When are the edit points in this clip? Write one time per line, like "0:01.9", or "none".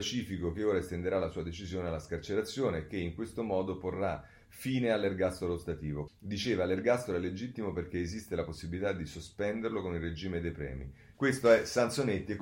0:06.1
0:11.1

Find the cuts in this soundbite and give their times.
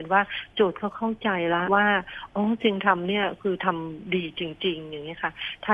0:01.7

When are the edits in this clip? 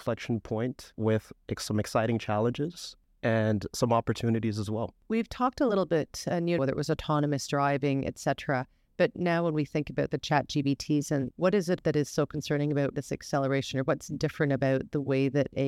0:06.6
0:11.3
0:12.9

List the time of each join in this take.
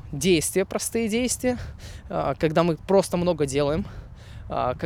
0:02.8

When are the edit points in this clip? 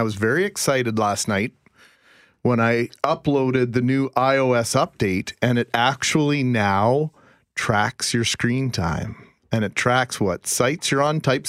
none

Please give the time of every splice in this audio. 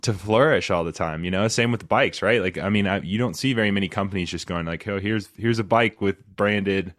none

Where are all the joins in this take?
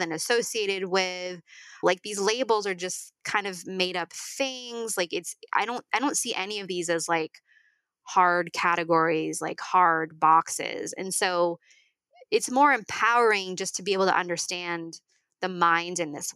0:01.8

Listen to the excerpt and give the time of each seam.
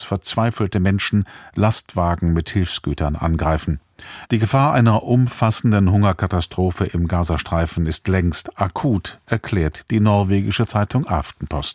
0:04.3

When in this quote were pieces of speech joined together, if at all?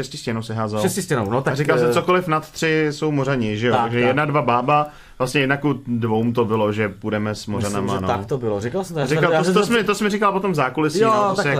none

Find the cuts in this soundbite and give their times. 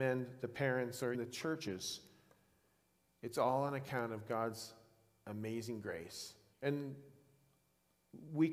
0:01.1
0:06.5

